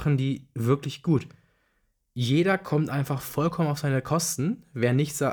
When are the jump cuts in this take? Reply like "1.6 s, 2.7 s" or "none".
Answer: none